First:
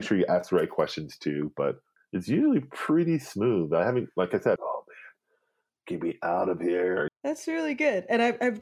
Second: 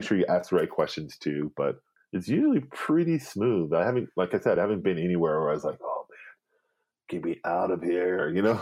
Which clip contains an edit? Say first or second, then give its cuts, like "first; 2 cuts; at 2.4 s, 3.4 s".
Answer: first; 2 cuts; at 4.6 s, 7.1 s